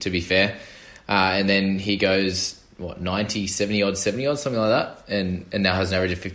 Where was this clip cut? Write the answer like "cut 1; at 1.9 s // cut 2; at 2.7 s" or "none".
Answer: none